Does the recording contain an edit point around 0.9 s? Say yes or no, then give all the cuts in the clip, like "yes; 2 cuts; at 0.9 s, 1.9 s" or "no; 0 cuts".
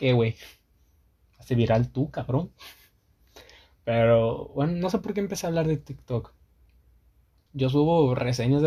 no; 1 cut; at 7.5 s